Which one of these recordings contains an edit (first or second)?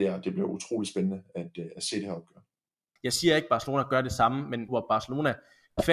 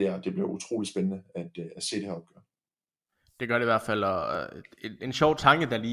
first